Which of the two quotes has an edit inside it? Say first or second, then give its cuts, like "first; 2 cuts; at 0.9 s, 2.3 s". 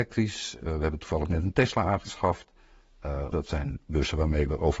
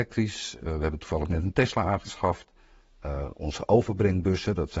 first; 1 cut; at 3.3 s